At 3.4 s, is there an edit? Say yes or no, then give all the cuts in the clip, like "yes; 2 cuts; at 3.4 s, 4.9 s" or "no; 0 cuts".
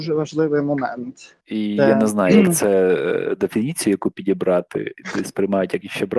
no; 1 cut; at 1.4 s